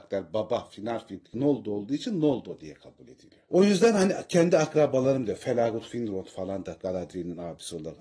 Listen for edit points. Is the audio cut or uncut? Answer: uncut